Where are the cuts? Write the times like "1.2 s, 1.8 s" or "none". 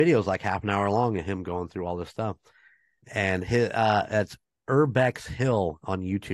none